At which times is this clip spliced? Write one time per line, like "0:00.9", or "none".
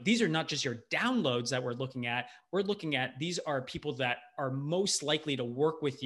none